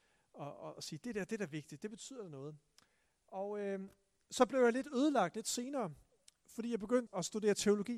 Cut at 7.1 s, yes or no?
yes